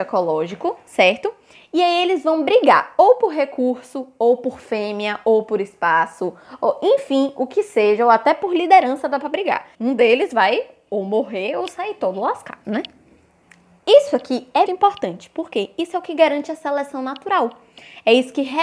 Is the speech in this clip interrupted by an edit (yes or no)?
yes